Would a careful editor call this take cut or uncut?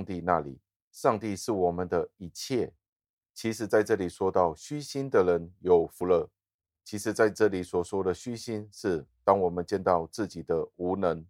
cut